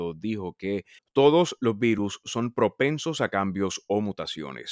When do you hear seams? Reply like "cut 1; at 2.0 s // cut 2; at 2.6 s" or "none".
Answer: cut 1; at 1.0 s

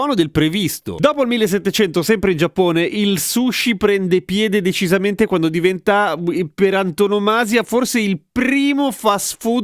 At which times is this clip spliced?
none

